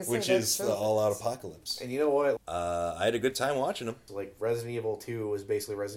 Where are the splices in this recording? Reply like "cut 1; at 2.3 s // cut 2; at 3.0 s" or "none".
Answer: cut 1; at 2.4 s // cut 2; at 4.1 s